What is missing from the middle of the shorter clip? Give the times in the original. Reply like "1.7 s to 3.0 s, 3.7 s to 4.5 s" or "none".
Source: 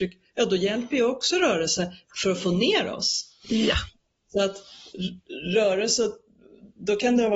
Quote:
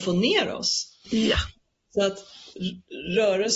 none